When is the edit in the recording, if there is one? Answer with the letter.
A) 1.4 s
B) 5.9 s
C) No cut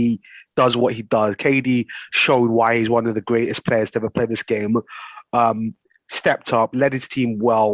C